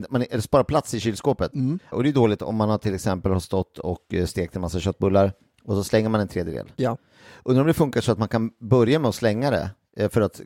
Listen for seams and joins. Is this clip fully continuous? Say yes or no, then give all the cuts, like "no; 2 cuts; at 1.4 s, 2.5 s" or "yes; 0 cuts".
no; 1 cut; at 1.9 s